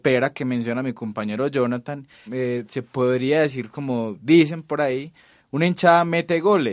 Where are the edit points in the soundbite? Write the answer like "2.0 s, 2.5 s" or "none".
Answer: 2.3 s